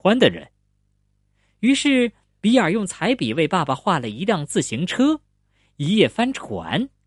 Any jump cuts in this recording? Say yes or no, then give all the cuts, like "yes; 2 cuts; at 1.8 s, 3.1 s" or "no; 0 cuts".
no; 0 cuts